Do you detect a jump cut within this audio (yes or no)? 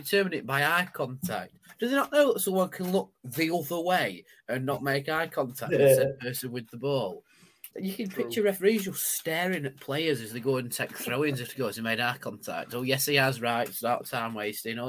yes